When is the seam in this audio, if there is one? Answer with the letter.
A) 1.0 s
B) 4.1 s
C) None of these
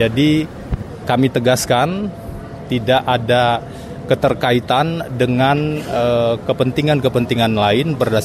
A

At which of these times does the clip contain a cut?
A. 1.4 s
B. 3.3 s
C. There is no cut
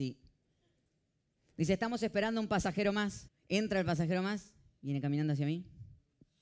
B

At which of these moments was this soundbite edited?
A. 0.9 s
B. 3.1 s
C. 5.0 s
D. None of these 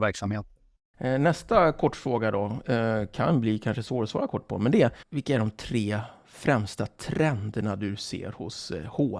C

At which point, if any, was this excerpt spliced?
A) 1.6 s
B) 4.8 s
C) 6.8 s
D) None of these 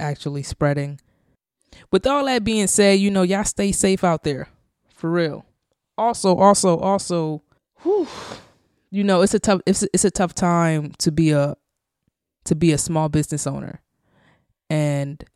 D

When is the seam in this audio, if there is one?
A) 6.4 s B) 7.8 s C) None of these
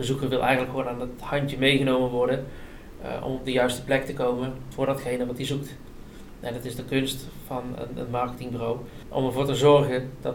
B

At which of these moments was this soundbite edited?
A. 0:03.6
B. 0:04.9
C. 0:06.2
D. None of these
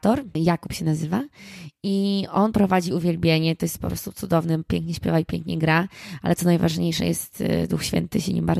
D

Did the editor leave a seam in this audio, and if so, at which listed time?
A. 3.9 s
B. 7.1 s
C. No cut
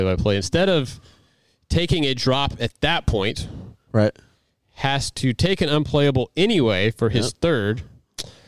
A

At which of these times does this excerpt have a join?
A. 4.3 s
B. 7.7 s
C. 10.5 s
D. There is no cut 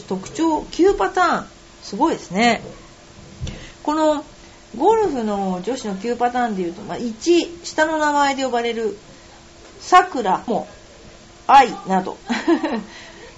C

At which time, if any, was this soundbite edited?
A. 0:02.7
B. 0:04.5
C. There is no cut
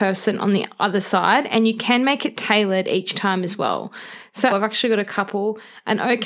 B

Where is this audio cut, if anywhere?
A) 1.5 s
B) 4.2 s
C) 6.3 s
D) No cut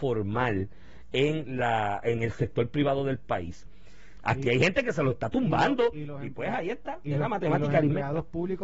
B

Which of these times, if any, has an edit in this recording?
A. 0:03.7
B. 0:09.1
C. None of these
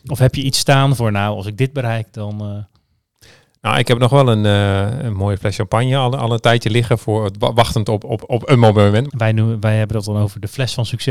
B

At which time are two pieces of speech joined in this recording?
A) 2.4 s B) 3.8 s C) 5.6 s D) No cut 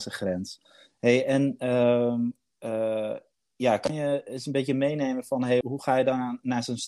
C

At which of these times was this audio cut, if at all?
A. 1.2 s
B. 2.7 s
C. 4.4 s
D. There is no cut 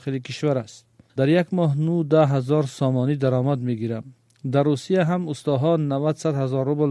A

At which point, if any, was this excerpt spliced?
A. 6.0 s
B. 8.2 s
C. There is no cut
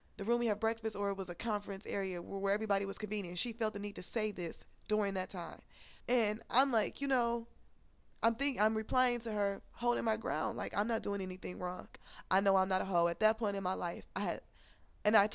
A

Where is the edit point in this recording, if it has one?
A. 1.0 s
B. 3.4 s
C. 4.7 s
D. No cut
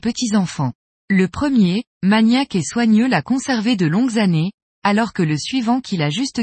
A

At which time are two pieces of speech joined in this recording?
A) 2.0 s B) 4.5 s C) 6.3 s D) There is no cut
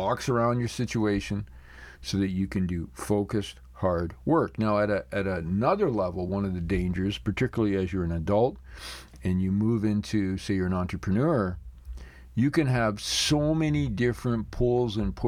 D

